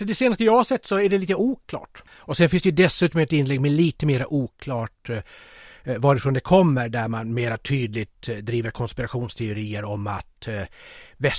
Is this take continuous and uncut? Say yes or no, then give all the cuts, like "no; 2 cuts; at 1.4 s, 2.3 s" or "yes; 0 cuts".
no; 1 cut; at 2.1 s